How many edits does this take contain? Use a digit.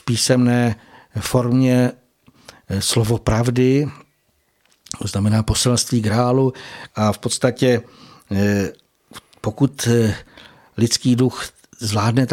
1